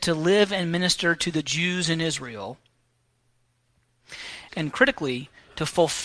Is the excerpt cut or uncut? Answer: cut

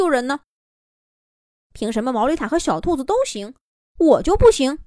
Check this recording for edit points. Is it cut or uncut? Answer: cut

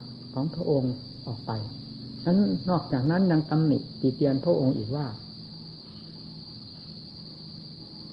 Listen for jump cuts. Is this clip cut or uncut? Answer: uncut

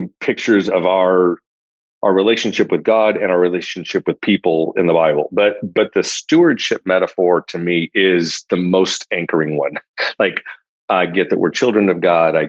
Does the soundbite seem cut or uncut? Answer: uncut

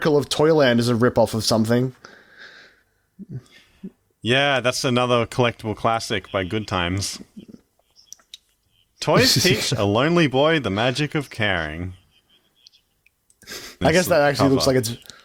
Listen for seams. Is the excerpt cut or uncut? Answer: cut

